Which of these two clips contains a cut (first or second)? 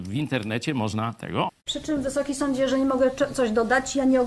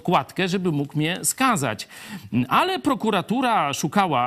first